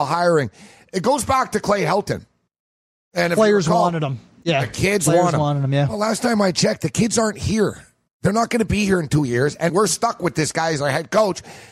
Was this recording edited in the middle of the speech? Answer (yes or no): yes